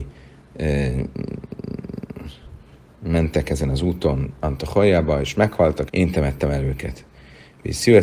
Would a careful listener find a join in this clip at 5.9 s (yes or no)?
yes